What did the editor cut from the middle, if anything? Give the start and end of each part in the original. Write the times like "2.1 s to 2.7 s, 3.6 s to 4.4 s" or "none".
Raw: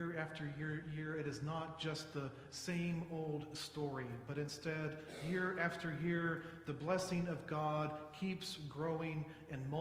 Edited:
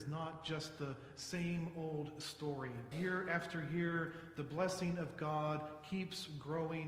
4.3 s to 5.2 s